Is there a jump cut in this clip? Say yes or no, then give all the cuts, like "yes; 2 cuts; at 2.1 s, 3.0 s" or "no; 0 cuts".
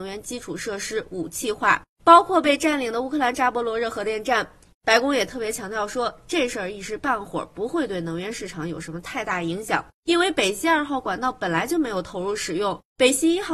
yes; 1 cut; at 4.7 s